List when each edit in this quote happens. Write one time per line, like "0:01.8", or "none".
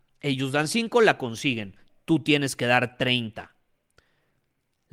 none